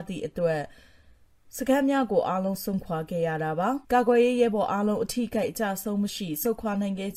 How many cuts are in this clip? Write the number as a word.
one